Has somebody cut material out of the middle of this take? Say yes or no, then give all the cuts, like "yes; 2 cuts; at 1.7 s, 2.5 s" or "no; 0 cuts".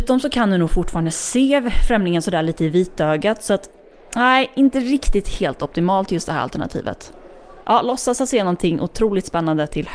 yes; 1 cut; at 7.6 s